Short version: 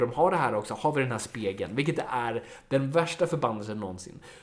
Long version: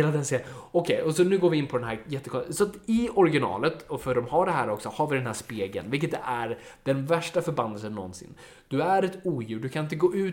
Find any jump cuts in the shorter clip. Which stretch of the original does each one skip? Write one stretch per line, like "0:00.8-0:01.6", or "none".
none

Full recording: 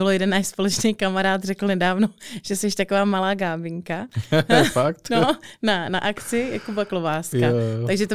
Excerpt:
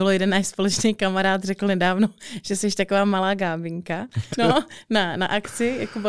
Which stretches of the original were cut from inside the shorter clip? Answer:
0:04.3-0:05.0

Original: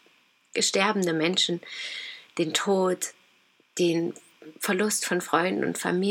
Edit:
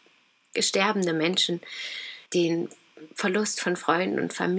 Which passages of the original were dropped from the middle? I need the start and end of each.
0:02.3-0:03.7

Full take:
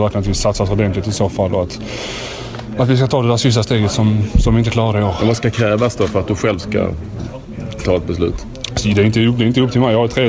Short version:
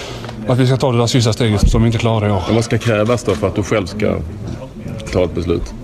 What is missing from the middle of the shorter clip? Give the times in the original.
0:03.9-0:04.3

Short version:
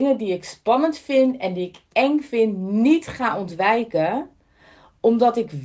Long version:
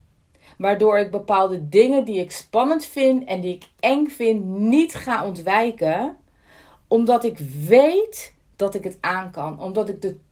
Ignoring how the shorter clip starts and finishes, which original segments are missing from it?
none

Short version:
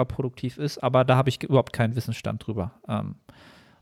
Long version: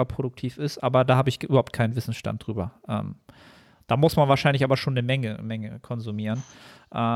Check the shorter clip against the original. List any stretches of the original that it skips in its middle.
none

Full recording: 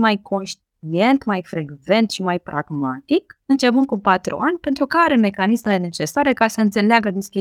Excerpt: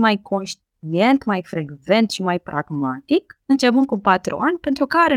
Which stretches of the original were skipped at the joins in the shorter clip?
none

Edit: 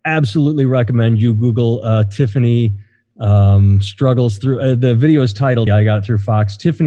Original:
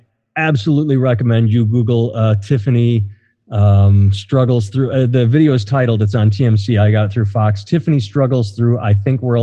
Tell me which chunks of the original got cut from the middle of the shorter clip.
0:06.0-0:06.7

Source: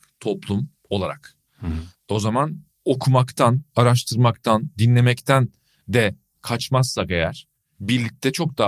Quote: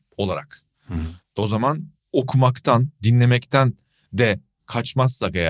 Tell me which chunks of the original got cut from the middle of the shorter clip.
0:03.7-0:04.7

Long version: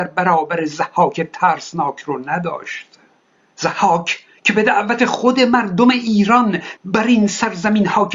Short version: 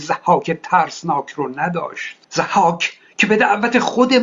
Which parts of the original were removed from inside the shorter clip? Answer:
0:02.9-0:03.5

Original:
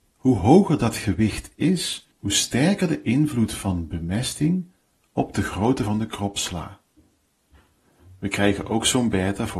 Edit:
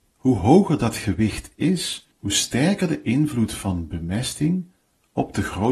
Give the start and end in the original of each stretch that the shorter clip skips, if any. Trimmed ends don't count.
none

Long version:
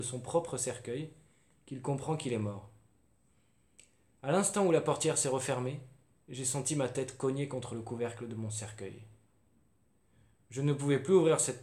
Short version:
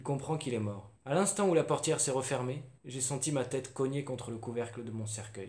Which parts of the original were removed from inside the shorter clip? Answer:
0:02.8-0:04.1
0:06.0-0:06.2

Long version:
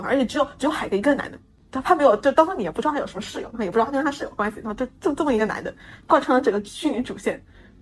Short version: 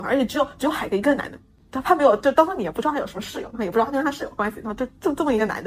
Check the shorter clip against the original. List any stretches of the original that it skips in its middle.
none

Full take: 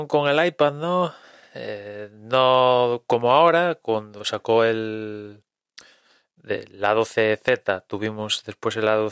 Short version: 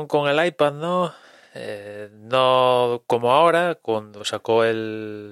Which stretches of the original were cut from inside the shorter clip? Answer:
none

